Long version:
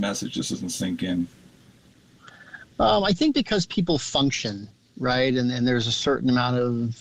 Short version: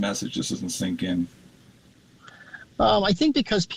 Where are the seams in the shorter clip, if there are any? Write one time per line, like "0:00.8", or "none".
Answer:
none